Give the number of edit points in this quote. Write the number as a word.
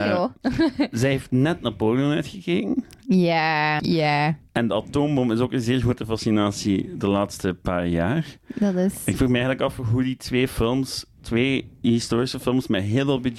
one